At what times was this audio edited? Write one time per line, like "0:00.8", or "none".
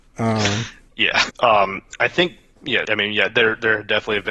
0:01.3
0:02.8

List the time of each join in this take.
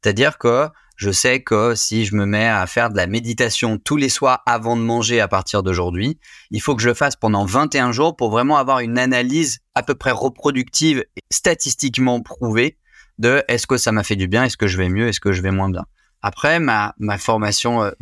none

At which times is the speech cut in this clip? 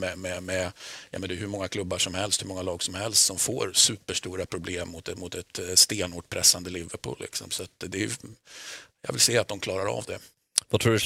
none

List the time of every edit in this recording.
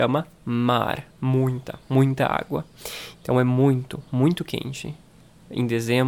0:03.2

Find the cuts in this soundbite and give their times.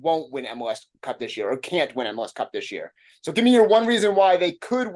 none

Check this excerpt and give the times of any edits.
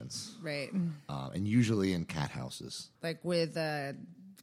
0:03.0

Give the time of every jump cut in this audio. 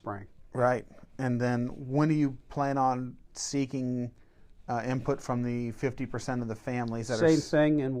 none

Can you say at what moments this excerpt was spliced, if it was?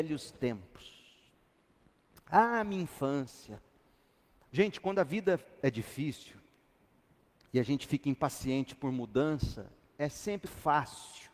0:04.4
0:10.4

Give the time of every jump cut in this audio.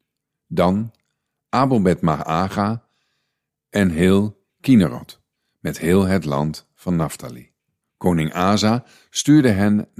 0:07.8

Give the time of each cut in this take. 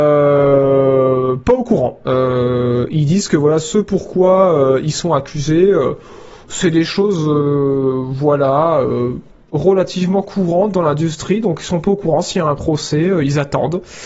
0:02.0

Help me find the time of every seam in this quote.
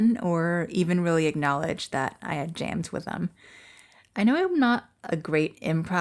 none

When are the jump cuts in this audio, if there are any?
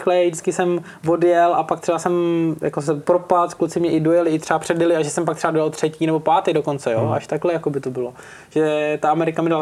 none

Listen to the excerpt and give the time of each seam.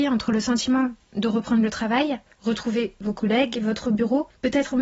none

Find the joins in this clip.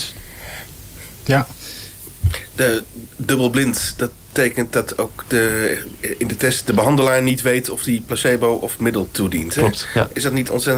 none

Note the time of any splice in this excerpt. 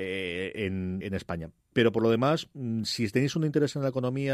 0:01.0

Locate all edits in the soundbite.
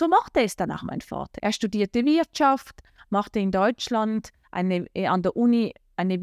0:01.4

